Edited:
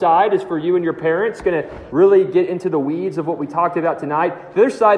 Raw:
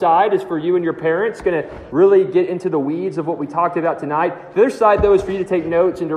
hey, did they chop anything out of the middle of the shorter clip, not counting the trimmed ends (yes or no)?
no